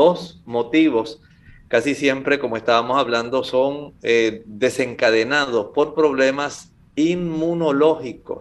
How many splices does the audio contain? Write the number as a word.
zero